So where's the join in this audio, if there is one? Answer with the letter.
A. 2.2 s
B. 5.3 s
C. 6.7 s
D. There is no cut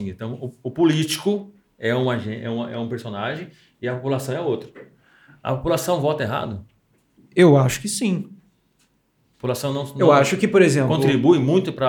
D